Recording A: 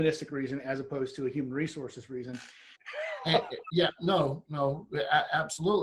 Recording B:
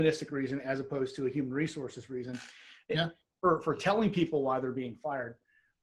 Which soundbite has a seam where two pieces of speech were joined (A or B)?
A